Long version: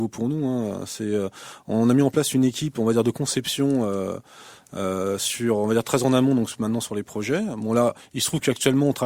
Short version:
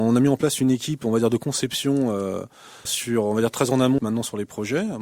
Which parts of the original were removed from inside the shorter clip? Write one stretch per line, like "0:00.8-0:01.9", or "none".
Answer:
0:04.6-0:05.2
0:06.3-0:06.6